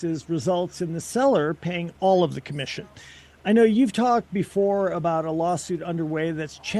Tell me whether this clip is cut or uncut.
uncut